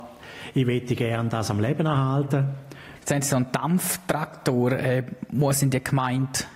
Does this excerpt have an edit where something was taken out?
yes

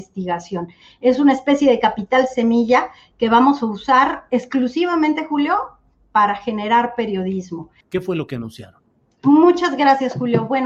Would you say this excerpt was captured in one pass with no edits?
no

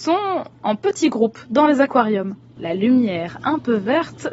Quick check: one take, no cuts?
no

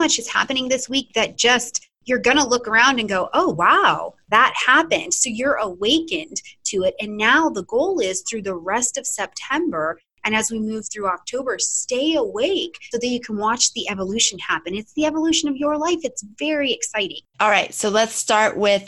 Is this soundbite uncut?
no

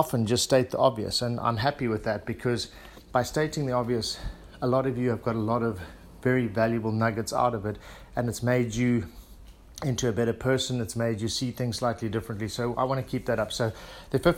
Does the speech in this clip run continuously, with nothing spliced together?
yes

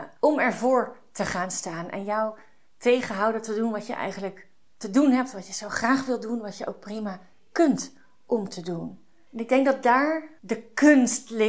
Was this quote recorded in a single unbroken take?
yes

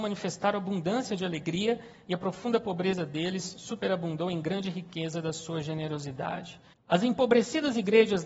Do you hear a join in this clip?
yes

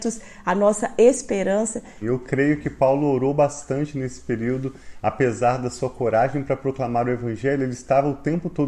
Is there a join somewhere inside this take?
yes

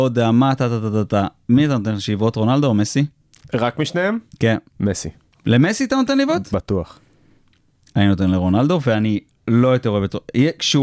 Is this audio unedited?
no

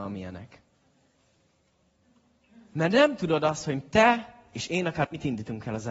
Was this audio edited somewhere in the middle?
no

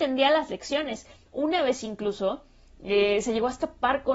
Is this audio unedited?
yes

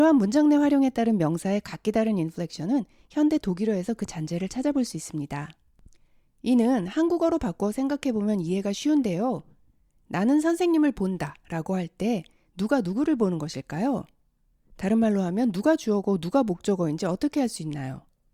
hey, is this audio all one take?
yes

